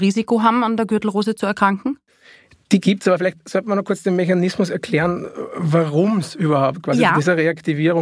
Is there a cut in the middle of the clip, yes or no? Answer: no